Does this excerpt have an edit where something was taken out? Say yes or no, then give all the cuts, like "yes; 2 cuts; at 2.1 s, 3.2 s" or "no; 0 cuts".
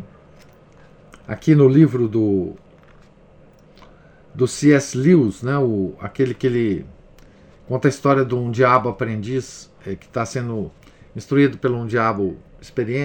yes; 1 cut; at 1.2 s